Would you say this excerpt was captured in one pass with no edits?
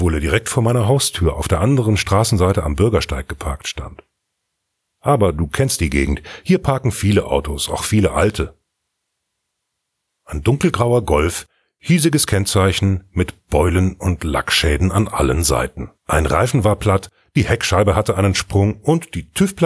no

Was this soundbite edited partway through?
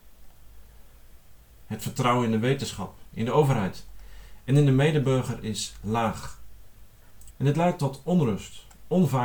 yes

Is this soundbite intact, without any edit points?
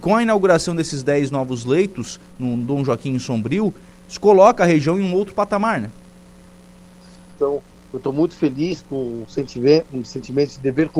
no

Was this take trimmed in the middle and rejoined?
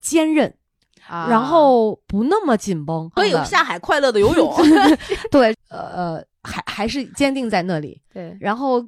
yes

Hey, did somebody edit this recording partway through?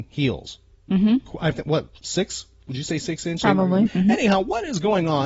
yes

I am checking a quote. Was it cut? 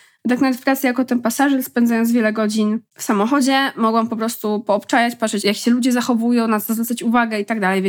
yes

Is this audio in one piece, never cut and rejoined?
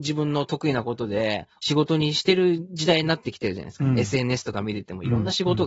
yes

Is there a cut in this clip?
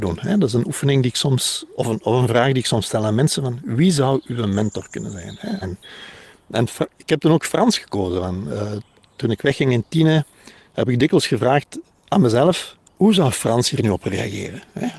yes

